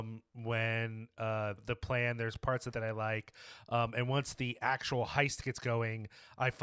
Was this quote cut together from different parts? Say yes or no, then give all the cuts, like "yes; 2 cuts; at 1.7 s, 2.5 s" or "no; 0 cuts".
yes; 2 cuts; at 1.6 s, 2.7 s